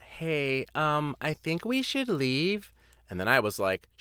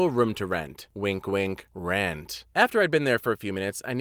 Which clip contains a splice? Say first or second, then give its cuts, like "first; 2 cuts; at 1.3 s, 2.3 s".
second; 1 cut; at 2.5 s